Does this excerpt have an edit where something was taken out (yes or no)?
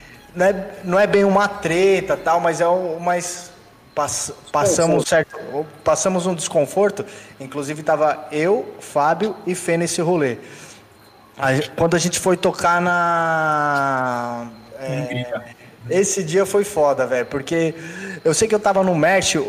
yes